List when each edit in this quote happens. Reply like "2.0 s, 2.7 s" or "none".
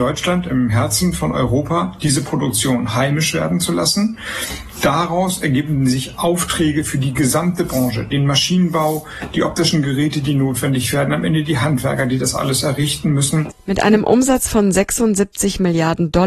none